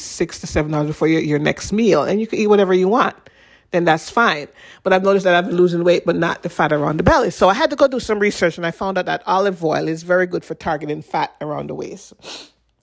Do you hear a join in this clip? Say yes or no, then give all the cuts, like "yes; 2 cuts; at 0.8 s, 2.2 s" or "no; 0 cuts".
no; 0 cuts